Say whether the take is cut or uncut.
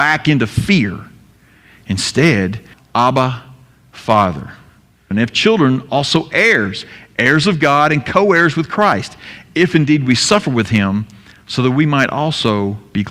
cut